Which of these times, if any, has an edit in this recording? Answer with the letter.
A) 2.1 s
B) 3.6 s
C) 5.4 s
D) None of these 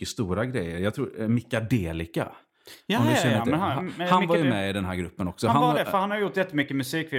D